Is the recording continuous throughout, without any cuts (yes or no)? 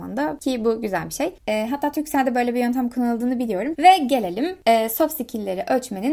no